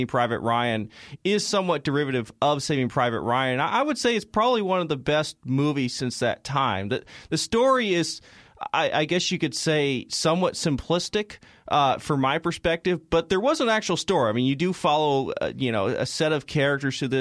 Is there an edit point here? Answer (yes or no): no